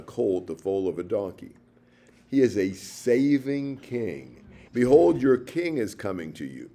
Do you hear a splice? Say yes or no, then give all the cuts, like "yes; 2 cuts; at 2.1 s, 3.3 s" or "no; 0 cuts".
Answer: yes; 2 cuts; at 2.1 s, 4.7 s